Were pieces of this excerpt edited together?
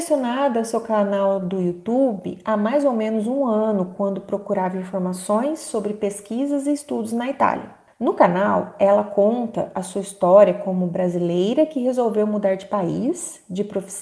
no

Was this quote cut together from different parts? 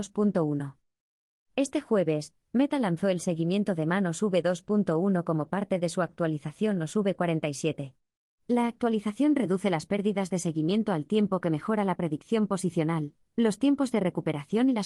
no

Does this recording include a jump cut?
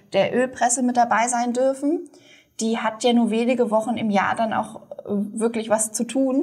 no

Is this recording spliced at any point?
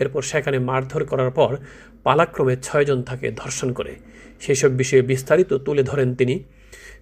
no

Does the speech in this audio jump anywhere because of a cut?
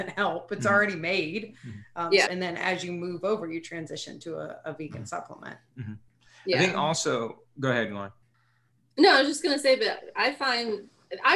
yes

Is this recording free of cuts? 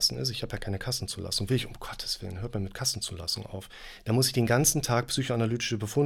yes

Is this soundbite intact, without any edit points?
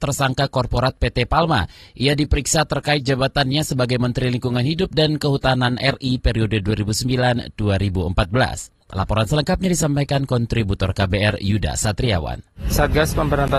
no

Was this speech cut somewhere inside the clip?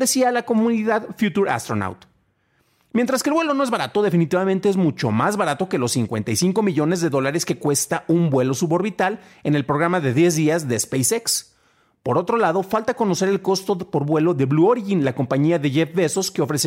no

